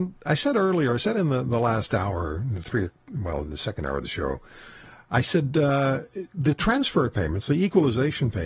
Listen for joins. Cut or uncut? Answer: uncut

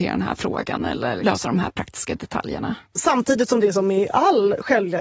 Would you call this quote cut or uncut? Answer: cut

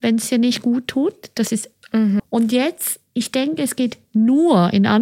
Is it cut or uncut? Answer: cut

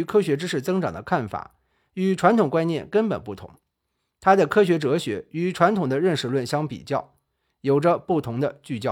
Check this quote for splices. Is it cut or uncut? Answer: uncut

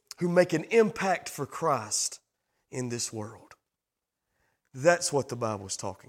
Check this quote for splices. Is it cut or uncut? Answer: uncut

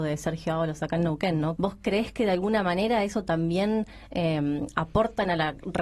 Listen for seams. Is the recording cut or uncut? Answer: cut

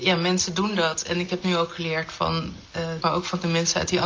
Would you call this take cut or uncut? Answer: cut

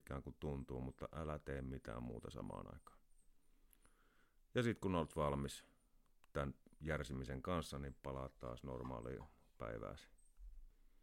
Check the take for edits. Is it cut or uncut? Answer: uncut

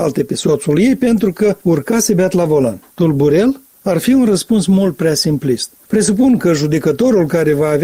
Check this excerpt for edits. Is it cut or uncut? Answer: uncut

